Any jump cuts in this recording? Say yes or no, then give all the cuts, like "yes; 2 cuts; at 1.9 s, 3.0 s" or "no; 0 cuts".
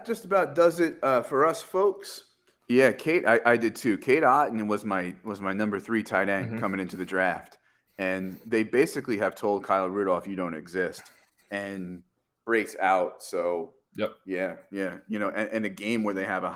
yes; 1 cut; at 2.6 s